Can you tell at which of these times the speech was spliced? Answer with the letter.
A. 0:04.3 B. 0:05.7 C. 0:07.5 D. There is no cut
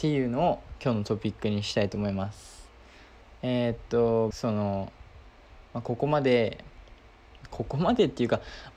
A